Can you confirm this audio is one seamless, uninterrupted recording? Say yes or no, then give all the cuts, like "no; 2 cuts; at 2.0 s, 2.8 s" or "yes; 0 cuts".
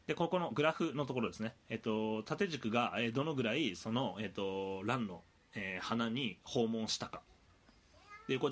yes; 0 cuts